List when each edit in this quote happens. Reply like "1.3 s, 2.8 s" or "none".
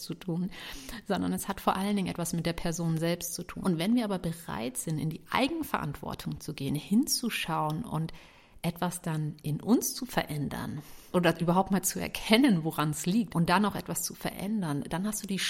3.6 s, 11.1 s, 13.3 s